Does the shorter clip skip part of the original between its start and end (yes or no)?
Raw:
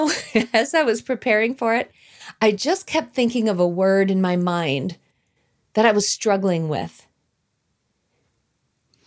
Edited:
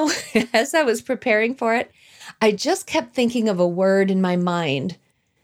no